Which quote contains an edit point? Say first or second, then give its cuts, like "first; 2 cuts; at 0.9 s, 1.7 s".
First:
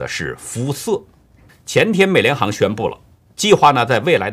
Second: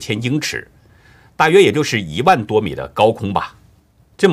first; 1 cut; at 1.5 s